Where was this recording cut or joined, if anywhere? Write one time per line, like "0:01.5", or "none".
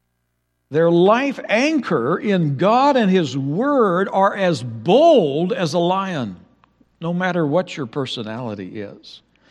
none